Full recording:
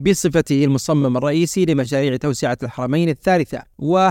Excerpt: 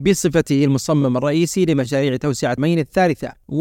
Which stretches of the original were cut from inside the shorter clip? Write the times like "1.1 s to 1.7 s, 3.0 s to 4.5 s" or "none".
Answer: 2.6 s to 2.9 s